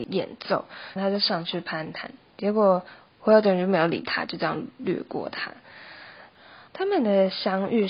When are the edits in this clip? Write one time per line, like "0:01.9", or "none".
0:01.0
0:06.7